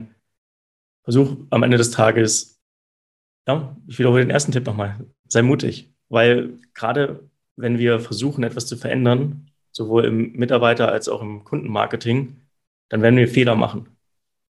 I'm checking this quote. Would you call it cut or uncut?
uncut